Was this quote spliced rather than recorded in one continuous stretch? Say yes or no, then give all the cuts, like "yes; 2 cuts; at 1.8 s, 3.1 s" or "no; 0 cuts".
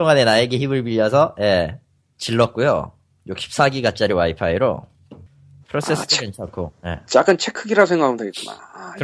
yes; 1 cut; at 5.6 s